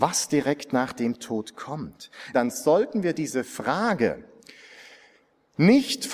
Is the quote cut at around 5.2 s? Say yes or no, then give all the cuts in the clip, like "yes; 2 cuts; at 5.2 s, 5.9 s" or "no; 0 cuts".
no; 1 cut; at 2.3 s